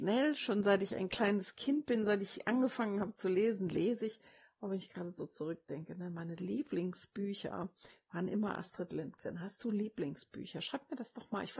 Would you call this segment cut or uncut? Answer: uncut